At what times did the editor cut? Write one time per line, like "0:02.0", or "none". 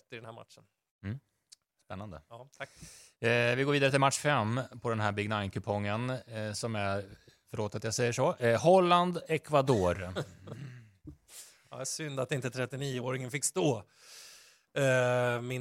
none